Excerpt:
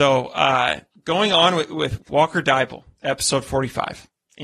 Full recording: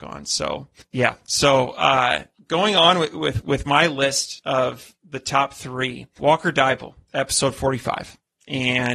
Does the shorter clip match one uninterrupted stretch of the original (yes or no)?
no